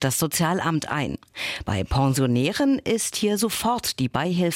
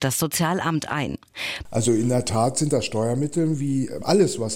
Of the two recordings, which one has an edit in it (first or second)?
second